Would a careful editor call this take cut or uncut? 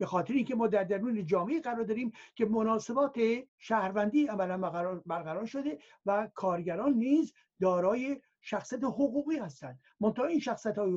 cut